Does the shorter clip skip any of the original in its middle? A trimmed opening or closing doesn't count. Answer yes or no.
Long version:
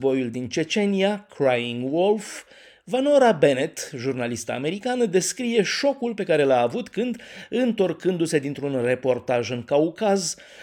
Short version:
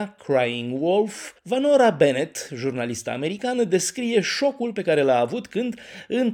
yes